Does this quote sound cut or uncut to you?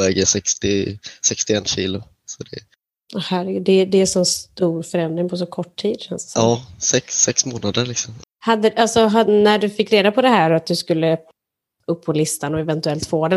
cut